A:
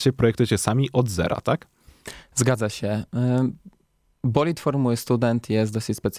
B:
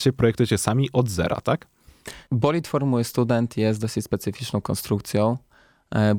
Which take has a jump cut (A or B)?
B